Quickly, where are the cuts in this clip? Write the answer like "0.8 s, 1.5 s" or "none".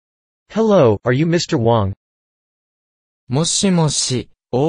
none